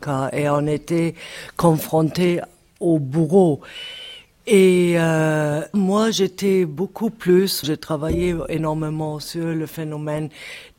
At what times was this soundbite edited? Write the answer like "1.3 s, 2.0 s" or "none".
5.7 s, 7.6 s